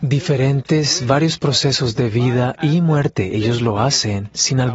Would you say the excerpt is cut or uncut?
uncut